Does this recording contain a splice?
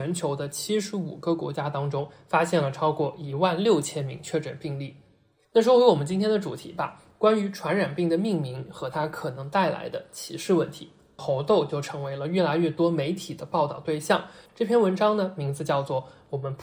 yes; 2 cuts; at 11.2 s, 14.5 s

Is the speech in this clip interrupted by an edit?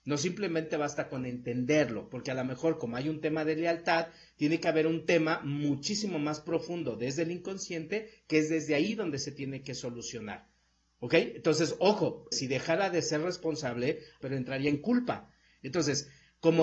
yes; 3 cuts; at 12.3 s, 14.2 s, 15.6 s

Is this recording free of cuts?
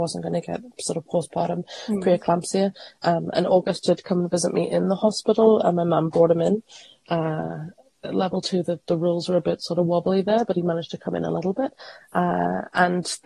yes; 0 cuts

